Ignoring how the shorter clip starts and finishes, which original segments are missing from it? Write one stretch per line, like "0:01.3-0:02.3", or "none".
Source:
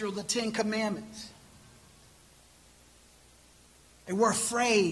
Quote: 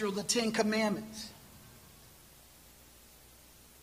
none